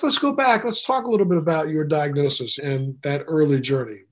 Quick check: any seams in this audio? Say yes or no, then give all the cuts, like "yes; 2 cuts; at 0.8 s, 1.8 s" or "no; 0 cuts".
yes; 1 cut; at 2.6 s